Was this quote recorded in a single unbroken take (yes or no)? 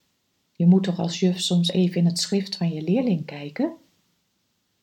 yes